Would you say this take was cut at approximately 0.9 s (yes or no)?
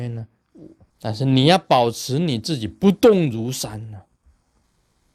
yes